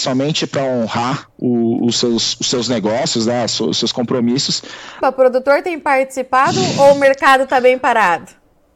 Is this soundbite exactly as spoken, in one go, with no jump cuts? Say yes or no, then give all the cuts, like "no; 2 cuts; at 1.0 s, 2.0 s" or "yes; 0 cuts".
no; 1 cut; at 5.0 s